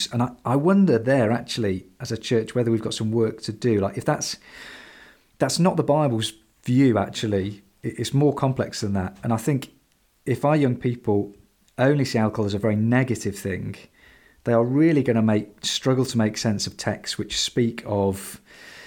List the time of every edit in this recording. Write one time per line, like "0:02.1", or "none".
none